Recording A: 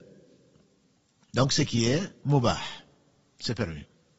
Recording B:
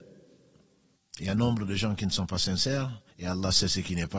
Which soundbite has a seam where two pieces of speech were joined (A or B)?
B